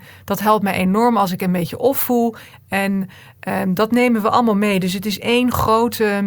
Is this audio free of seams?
no; 1 cut; at 2.5 s

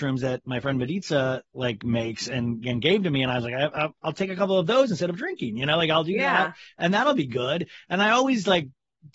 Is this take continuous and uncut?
yes; 0 cuts

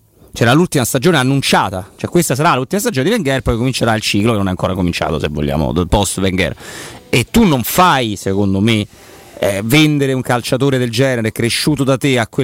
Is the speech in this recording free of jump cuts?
yes; 0 cuts

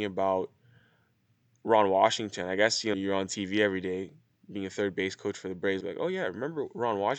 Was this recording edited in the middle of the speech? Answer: yes; 2 cuts; at 2.9 s, 5.8 s

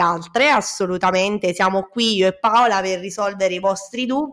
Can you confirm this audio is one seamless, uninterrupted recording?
yes; 0 cuts

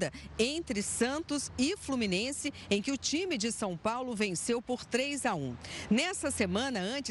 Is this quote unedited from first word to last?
yes; 0 cuts

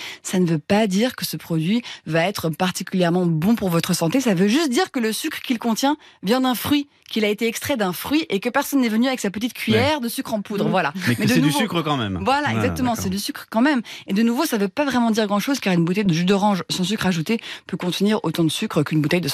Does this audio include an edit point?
no; 0 cuts

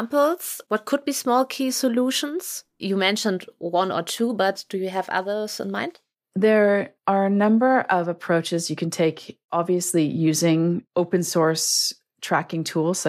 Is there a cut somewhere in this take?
no; 0 cuts

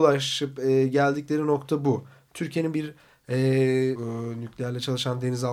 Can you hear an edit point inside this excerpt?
yes; 1 cut; at 4.0 s

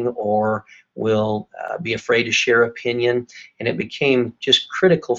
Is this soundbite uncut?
yes; 0 cuts

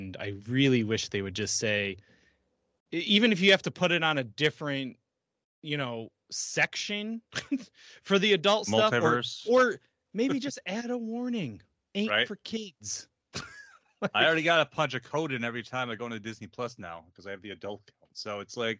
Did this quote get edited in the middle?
no; 0 cuts

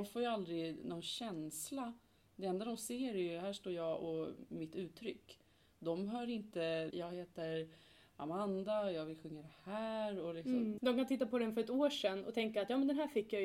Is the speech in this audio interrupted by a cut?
yes; 2 cuts; at 6.9 s, 10.8 s

